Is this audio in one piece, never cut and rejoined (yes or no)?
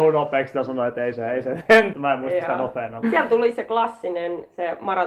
no